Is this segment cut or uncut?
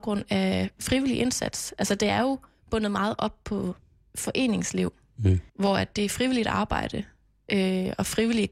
cut